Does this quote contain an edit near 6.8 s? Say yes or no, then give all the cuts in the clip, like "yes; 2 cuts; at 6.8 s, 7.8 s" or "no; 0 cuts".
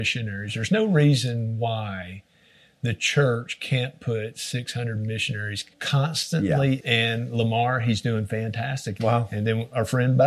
yes; 3 cuts; at 5.7 s, 6.8 s, 9.0 s